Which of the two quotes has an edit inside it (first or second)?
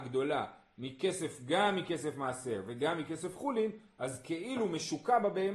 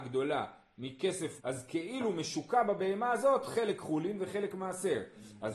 second